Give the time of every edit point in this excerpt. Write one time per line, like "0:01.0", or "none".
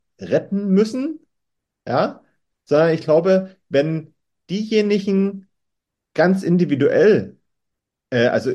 none